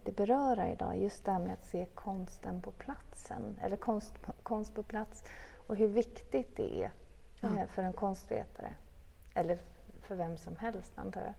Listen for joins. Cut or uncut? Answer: uncut